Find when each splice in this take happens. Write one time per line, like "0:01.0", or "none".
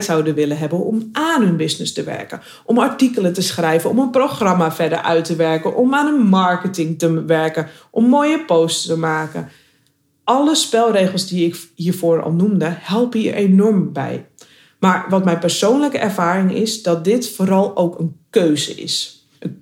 none